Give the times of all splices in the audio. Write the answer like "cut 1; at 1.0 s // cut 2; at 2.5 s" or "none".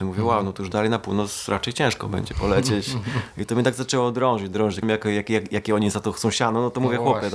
cut 1; at 4.8 s